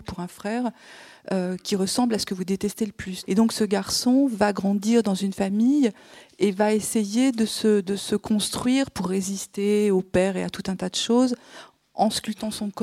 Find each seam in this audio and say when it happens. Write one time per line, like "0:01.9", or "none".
0:03.2
0:07.8